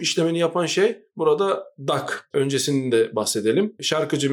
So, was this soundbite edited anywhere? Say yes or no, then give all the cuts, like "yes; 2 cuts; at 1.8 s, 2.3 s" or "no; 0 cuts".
yes; 1 cut; at 2.3 s